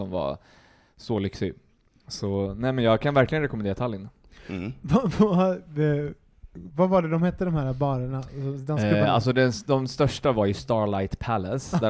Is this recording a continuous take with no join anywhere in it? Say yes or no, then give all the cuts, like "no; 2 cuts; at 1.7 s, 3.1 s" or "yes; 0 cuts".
yes; 0 cuts